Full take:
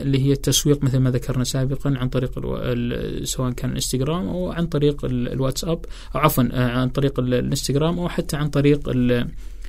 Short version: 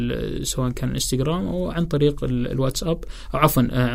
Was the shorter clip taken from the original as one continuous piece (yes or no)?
yes